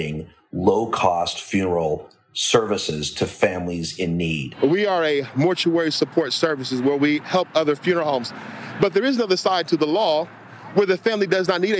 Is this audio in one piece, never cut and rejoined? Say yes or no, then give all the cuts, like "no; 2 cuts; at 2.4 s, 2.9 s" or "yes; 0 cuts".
yes; 0 cuts